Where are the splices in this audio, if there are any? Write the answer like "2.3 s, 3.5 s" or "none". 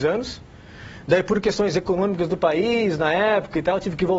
none